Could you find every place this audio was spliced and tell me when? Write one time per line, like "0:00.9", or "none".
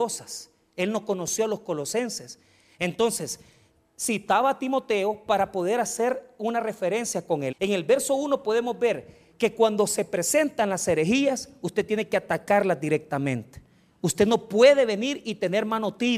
0:07.5